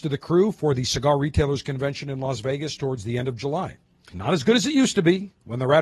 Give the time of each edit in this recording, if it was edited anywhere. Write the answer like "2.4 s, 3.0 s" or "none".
4.1 s